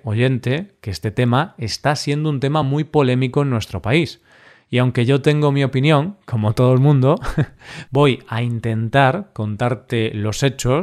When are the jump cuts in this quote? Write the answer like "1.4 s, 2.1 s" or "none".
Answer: none